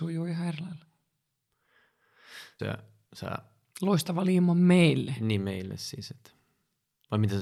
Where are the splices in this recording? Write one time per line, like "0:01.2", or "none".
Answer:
0:02.6